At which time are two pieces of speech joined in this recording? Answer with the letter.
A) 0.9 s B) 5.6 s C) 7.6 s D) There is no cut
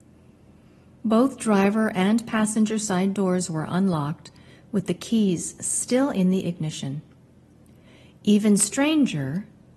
D